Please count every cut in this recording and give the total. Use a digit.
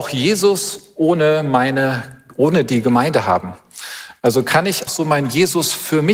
1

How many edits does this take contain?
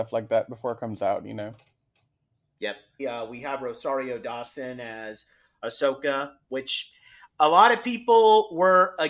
1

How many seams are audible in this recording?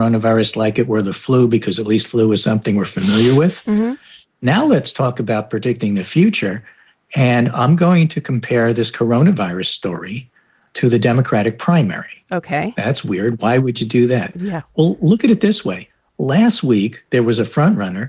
0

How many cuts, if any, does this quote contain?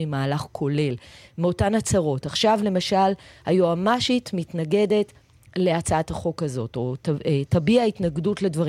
0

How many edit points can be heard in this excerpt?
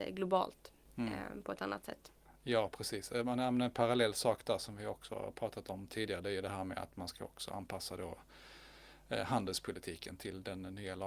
0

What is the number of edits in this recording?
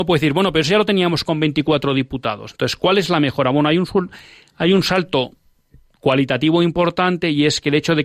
0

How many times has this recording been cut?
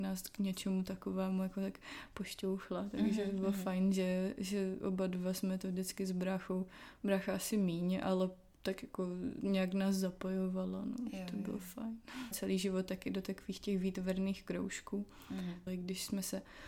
2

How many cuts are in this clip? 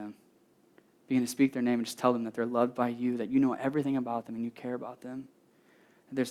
0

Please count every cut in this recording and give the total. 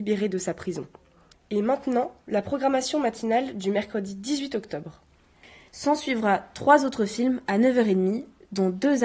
2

